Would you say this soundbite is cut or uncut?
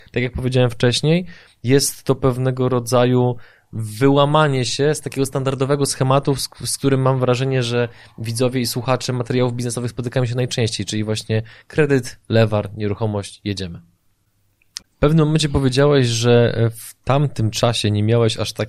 cut